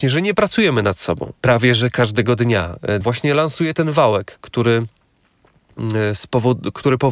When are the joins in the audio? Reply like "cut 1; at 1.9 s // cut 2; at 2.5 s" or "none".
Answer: cut 1; at 1.4 s // cut 2; at 3.0 s